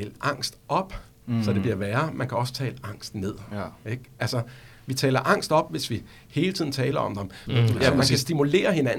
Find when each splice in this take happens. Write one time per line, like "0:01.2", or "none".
0:07.5